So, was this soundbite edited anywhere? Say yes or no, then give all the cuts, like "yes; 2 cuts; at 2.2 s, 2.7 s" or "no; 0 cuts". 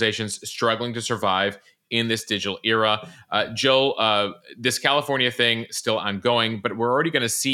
no; 0 cuts